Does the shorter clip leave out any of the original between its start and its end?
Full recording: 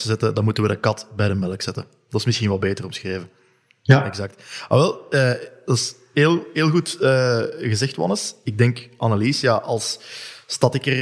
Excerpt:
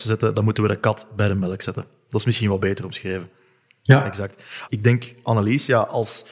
yes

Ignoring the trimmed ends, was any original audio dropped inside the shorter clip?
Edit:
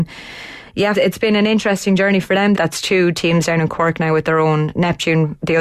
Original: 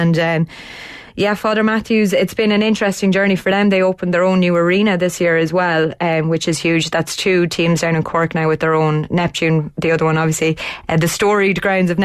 yes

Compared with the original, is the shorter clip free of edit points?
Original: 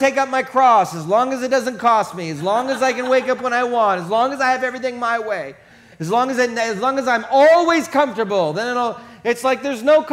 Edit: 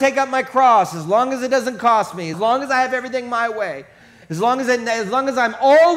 no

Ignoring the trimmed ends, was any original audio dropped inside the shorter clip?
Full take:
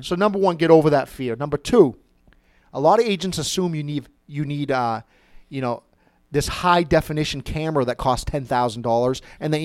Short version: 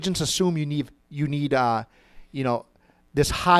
no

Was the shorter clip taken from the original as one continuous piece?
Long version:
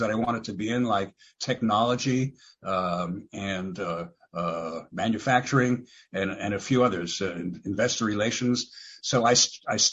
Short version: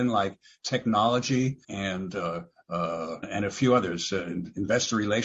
no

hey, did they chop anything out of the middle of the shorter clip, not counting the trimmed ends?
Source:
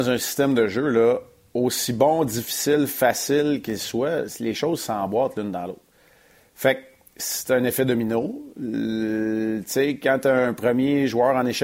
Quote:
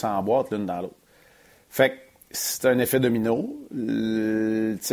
no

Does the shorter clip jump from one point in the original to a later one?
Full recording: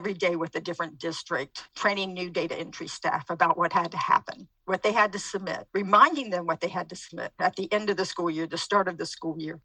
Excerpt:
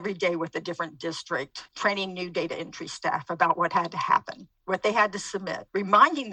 no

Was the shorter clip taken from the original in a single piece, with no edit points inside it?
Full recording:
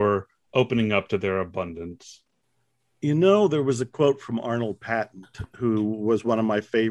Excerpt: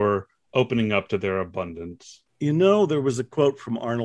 no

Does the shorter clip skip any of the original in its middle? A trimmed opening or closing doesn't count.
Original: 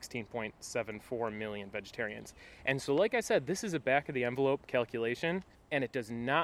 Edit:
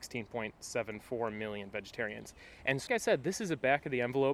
yes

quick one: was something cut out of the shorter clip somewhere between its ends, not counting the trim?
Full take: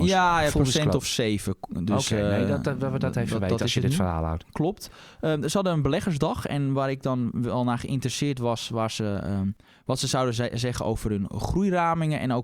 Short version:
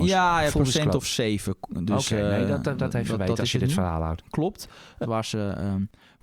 yes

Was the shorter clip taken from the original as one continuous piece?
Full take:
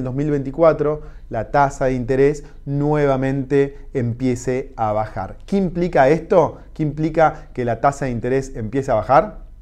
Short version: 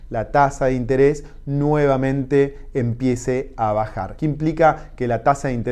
no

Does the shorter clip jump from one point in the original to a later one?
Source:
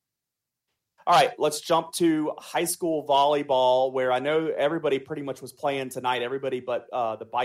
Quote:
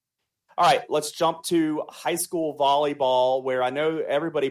no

